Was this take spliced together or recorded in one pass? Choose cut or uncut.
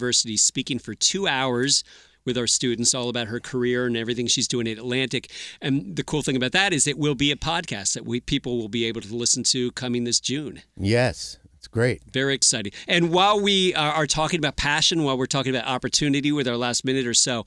uncut